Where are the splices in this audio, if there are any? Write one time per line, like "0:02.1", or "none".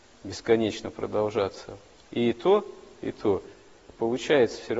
none